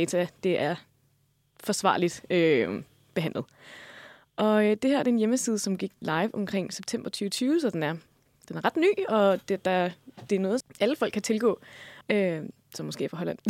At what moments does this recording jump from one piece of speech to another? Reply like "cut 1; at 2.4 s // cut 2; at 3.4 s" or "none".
cut 1; at 10.6 s // cut 2; at 12.0 s